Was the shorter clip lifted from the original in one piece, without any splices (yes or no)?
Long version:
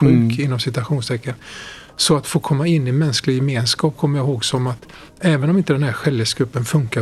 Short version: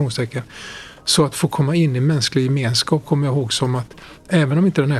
yes